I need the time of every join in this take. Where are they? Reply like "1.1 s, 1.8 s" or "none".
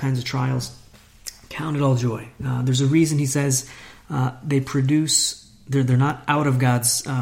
none